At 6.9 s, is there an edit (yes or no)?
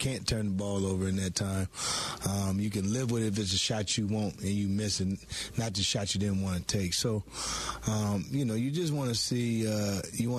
no